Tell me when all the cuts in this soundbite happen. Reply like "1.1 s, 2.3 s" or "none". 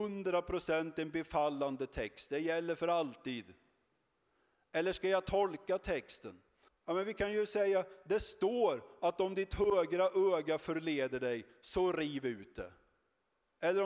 6.7 s